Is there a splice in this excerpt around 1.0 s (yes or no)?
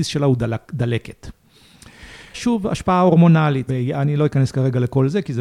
no